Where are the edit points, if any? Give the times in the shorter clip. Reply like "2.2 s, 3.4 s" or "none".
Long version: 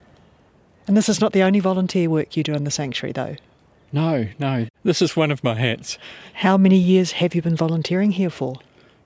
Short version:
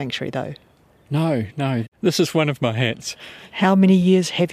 none